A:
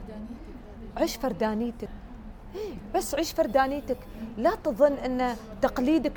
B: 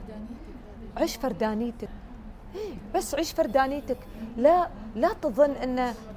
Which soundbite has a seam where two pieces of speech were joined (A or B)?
A